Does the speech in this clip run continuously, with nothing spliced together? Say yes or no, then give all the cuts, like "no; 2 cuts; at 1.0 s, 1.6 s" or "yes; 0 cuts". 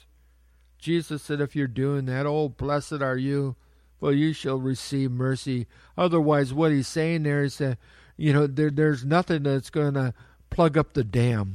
yes; 0 cuts